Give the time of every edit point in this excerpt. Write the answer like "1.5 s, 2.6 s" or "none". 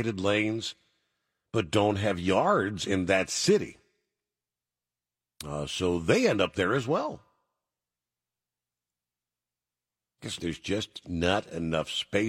10.4 s